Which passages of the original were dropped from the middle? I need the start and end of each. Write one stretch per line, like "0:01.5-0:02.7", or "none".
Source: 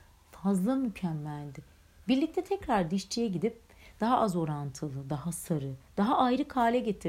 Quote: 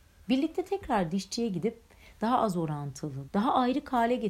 0:05.0-0:05.9